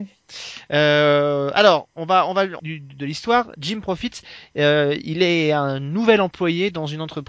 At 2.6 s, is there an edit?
yes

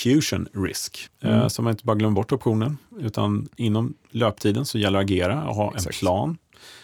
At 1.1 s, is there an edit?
yes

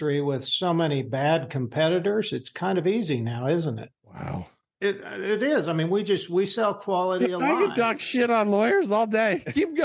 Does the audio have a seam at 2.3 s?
no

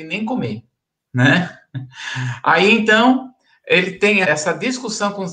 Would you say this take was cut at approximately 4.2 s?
yes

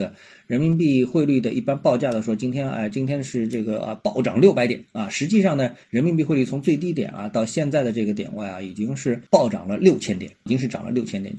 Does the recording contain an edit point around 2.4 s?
no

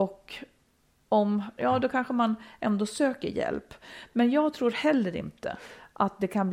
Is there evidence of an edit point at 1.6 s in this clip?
yes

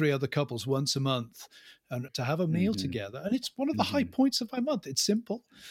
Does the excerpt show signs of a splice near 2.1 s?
yes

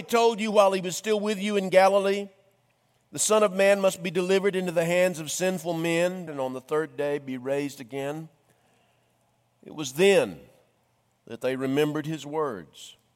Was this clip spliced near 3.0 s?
no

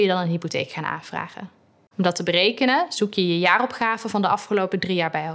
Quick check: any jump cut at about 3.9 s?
no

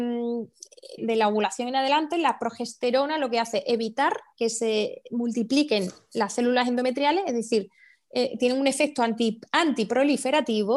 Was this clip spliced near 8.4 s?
no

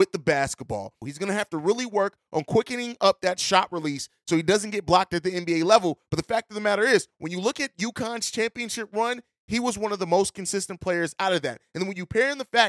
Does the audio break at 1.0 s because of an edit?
yes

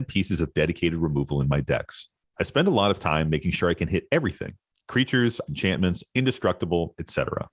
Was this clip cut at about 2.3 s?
no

